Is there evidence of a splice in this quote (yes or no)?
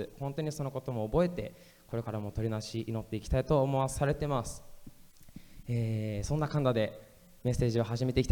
no